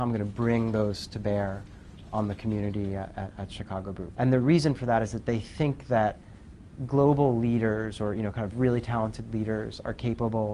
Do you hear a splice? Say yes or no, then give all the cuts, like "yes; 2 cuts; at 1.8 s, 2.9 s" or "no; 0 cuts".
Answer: yes; 1 cut; at 4.1 s